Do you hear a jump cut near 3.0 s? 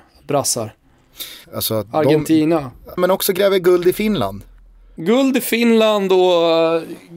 yes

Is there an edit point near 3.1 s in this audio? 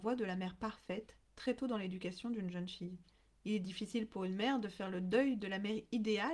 no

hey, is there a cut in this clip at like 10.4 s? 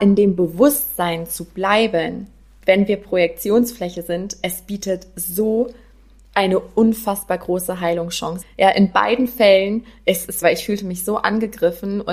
yes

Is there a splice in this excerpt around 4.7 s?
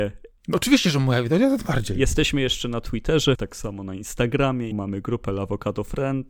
yes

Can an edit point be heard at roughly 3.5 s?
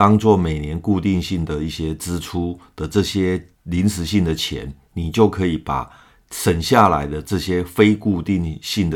yes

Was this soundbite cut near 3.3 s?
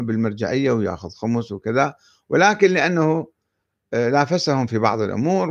no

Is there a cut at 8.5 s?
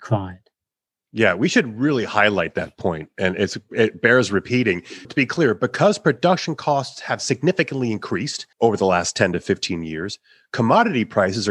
yes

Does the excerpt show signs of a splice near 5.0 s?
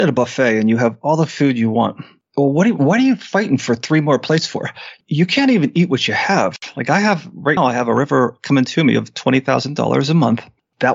no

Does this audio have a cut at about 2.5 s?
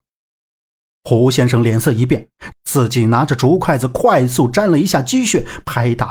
yes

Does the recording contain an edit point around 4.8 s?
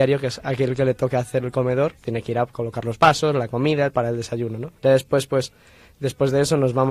yes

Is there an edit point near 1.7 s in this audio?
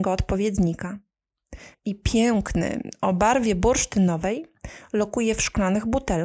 yes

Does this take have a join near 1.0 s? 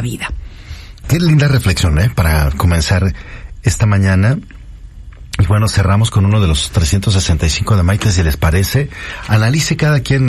yes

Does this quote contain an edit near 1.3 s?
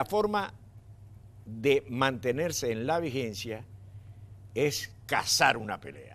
no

